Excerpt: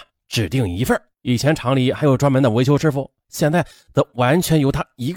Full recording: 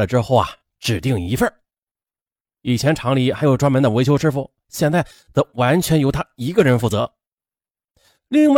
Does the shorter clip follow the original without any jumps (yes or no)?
no